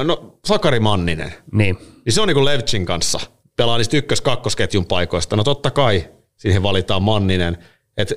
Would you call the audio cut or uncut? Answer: cut